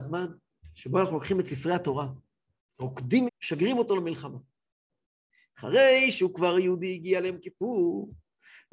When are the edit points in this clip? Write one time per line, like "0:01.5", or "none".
0:03.3